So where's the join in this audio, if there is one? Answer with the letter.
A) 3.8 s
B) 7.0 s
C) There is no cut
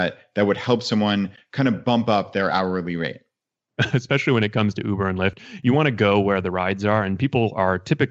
A